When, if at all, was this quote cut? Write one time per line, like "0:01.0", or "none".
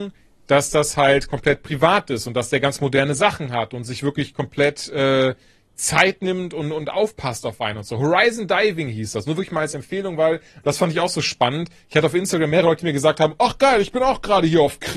none